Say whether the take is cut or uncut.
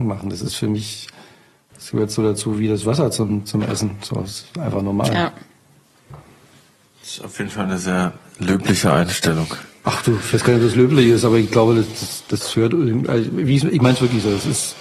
uncut